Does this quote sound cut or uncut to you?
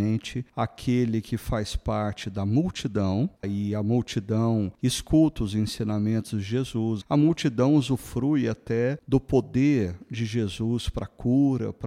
cut